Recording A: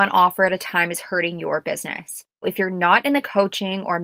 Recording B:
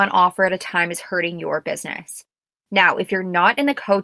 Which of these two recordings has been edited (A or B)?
A